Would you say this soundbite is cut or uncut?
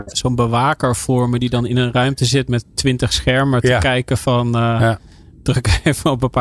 uncut